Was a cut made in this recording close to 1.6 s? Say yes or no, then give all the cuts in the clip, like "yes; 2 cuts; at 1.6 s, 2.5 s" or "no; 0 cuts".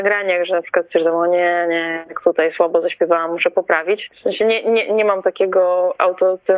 no; 1 cut; at 4.1 s